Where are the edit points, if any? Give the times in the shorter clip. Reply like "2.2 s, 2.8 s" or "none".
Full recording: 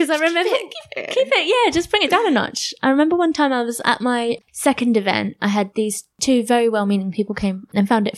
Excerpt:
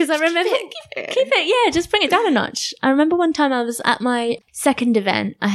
none